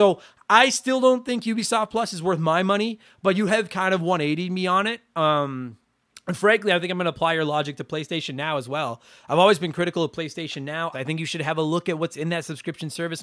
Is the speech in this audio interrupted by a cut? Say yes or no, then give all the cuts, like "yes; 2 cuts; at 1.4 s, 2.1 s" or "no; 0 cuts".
yes; 1 cut; at 10.9 s